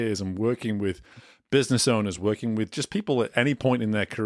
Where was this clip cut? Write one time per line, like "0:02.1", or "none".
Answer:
0:02.2

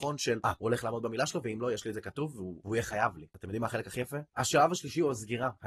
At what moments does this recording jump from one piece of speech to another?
0:04.3

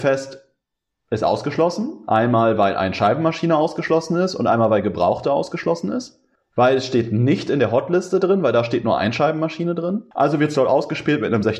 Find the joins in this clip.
0:06.4
0:10.1

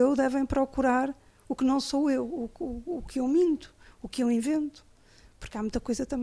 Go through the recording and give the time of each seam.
none

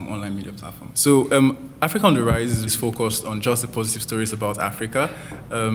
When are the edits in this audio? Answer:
0:00.9
0:02.7

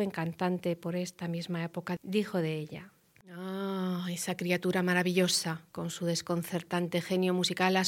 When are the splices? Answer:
none

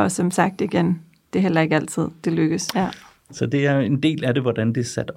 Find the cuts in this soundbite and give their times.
0:02.7

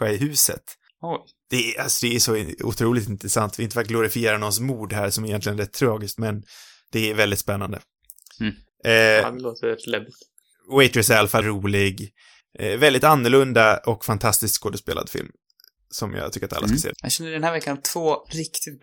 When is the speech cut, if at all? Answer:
0:11.4
0:16.9

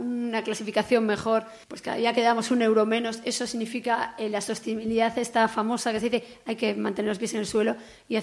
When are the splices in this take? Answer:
0:01.6

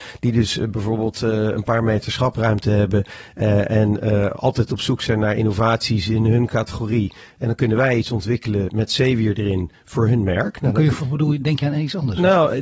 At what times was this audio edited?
0:11.0

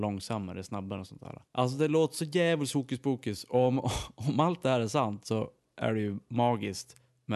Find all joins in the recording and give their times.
0:01.5

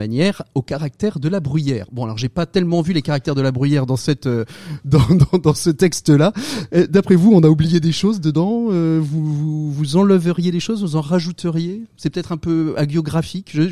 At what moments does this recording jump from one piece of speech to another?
none

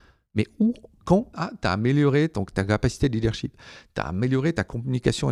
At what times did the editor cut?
0:01.3

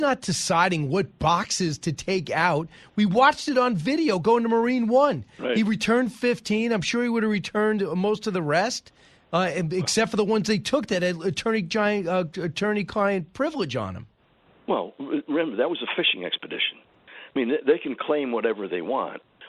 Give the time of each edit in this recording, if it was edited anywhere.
none

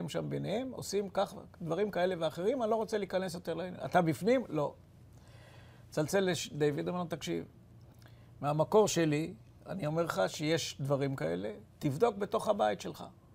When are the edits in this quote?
none

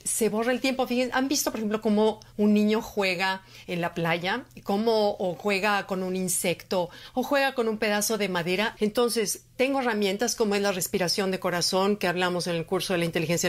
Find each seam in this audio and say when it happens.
0:08.8

